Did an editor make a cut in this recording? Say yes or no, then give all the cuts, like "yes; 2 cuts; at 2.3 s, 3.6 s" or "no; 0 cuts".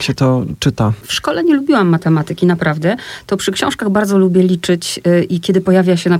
no; 0 cuts